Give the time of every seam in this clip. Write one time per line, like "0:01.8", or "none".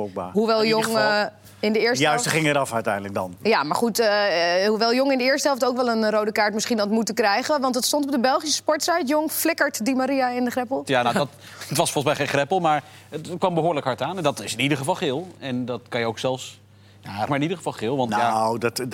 0:10.8
0:17.3